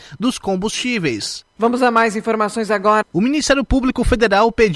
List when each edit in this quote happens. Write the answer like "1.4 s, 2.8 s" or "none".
1.6 s, 3.0 s